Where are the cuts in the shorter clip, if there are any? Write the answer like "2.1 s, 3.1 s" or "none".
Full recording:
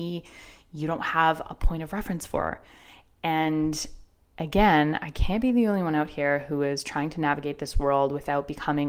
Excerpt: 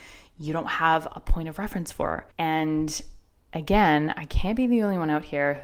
2.3 s